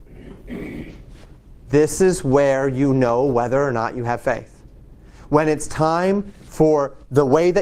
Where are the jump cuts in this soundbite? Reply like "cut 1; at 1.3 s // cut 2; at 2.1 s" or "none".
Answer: cut 1; at 1.6 s